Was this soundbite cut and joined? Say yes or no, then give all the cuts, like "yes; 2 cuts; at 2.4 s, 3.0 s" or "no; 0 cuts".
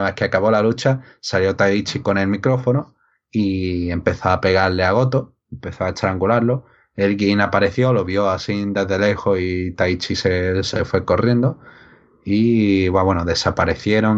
no; 0 cuts